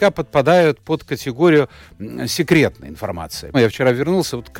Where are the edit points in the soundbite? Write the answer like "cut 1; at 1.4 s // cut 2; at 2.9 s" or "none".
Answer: cut 1; at 3.5 s